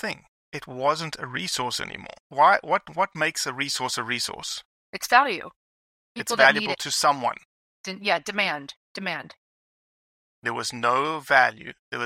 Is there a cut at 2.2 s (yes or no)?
yes